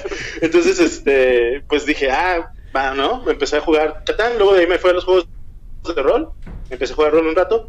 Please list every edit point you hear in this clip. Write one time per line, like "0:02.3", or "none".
none